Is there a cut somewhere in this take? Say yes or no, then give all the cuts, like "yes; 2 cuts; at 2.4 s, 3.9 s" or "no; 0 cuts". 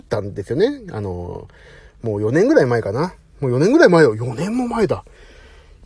no; 0 cuts